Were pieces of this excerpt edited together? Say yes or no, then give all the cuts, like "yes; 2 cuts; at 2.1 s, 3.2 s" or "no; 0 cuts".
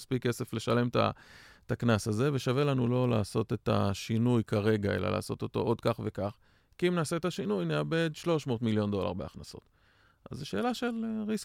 no; 0 cuts